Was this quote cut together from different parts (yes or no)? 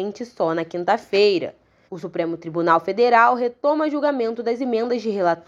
yes